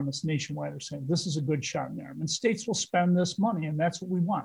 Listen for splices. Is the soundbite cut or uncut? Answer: uncut